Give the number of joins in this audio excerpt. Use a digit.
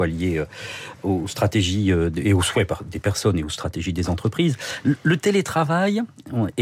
0